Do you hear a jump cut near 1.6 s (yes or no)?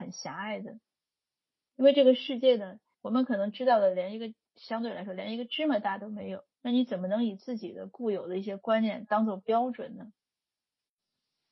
no